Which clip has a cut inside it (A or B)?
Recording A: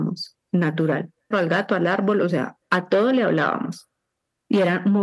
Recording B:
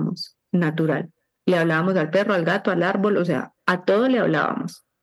A